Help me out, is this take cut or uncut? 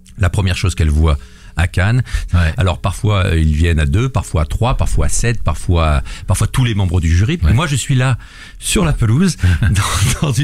cut